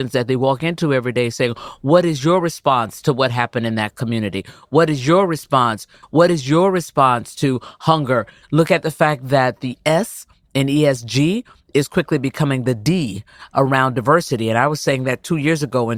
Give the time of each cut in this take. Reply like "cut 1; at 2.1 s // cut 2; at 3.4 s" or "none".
cut 1; at 6.0 s // cut 2; at 8.4 s